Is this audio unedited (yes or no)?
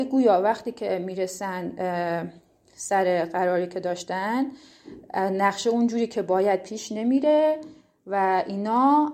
yes